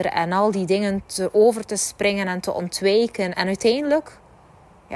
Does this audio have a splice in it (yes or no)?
yes